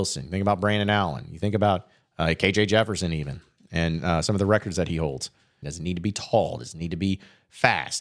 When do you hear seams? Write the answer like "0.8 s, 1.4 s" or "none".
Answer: 5.6 s